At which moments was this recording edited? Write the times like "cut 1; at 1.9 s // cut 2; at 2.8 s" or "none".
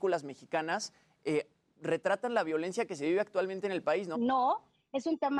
cut 1; at 4.1 s

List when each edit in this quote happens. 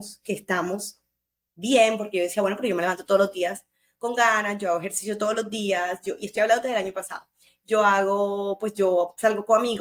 none

